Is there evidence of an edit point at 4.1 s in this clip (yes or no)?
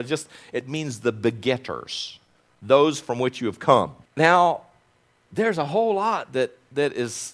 yes